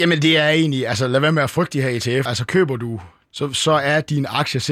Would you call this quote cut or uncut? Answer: cut